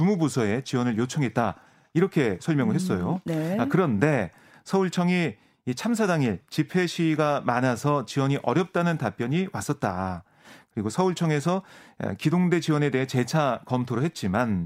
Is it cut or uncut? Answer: uncut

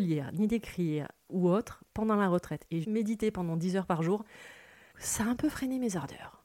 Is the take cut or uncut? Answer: cut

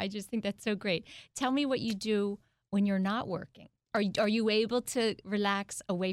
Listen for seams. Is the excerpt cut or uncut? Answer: cut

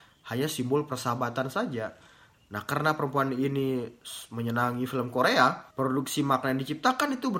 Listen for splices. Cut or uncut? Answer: cut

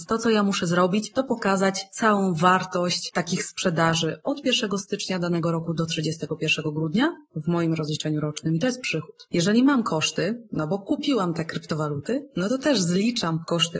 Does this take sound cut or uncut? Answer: cut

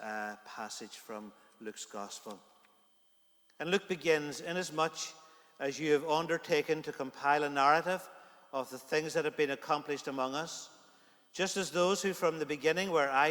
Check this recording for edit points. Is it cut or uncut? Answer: uncut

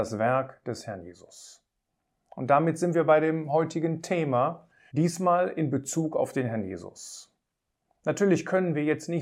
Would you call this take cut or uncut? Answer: cut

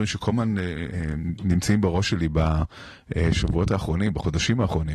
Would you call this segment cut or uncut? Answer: uncut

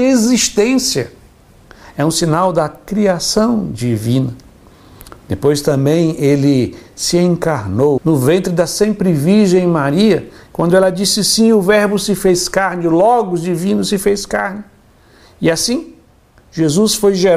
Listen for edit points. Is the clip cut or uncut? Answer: cut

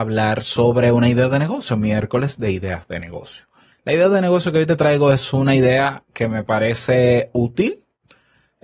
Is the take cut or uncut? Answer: uncut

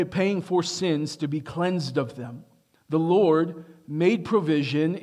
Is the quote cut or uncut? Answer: cut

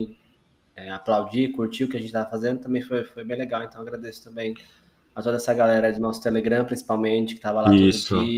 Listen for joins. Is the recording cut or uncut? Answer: uncut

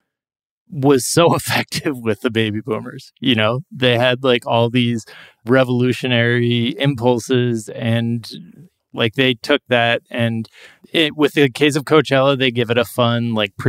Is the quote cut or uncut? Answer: uncut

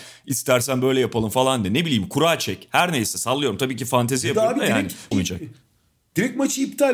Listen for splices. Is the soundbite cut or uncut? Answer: cut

